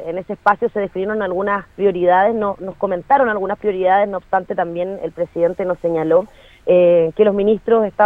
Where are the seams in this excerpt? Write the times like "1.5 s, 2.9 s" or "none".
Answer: none

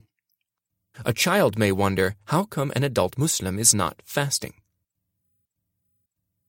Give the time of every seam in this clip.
0.9 s, 2.2 s

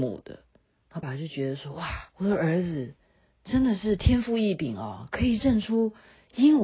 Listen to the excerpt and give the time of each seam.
1.0 s, 2.1 s

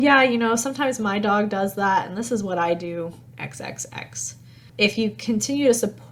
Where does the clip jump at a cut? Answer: none

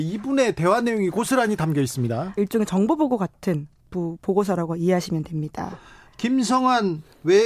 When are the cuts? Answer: 2.4 s

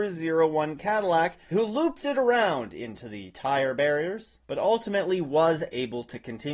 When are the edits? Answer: 1.5 s, 4.4 s

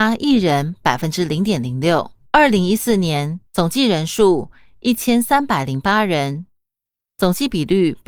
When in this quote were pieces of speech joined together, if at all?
2.3 s, 3.5 s

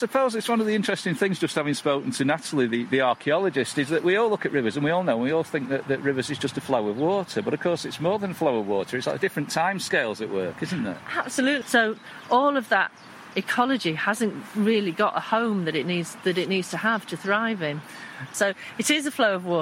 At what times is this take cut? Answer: 11.6 s, 13.3 s, 18.3 s

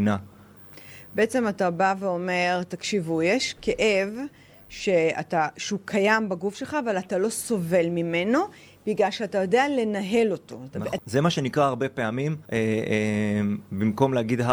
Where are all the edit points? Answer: 11.0 s, 12.5 s

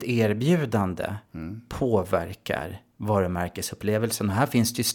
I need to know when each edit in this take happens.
1.2 s

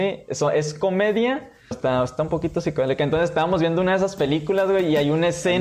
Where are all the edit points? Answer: 1.7 s

